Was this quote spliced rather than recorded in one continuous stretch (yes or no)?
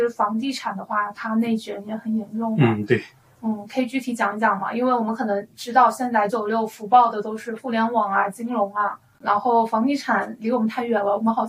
yes